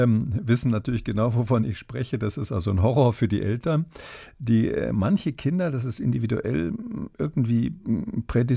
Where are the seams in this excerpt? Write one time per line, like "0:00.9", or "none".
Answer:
none

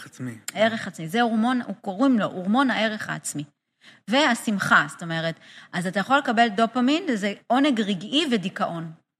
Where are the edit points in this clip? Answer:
none

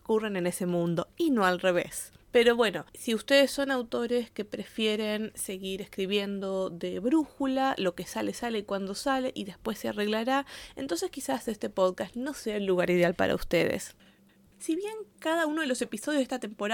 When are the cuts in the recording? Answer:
none

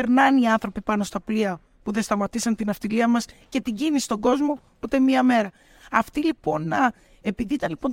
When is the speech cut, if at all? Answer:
none

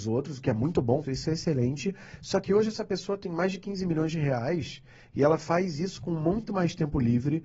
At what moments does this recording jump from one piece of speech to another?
0:01.0

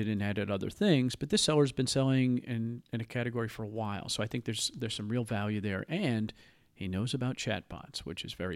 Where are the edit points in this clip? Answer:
none

